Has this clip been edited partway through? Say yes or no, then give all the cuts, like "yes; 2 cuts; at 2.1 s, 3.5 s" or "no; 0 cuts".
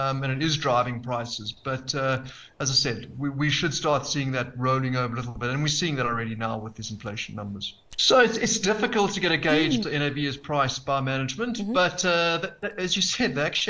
yes; 2 cuts; at 8.0 s, 9.8 s